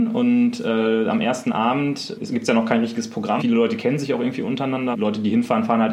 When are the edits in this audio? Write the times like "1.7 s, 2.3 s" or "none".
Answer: 2.1 s, 3.4 s, 4.9 s